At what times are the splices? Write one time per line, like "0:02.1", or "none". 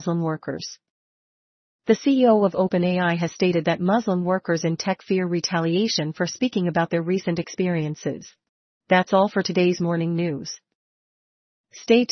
0:08.8